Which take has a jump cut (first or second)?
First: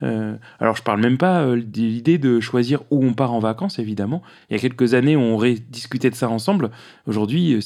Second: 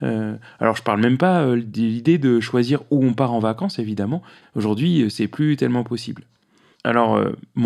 second